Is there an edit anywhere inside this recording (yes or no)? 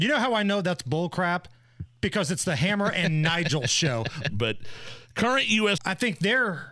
yes